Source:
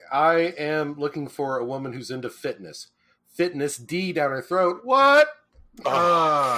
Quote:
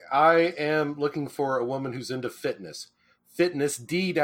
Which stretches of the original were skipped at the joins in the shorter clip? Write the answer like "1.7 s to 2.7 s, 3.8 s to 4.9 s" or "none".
none